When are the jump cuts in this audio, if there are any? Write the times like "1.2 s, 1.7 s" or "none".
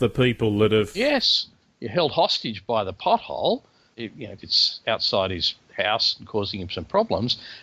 4.4 s